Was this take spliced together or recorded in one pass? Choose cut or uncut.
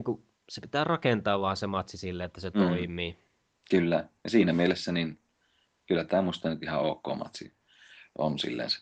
uncut